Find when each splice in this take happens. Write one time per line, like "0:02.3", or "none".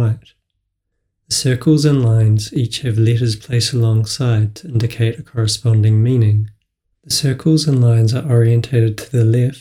0:06.9